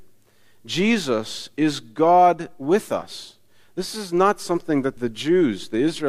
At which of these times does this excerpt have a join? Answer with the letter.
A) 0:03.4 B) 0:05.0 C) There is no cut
B